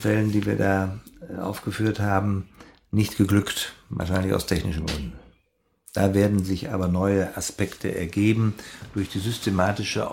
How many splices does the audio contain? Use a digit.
0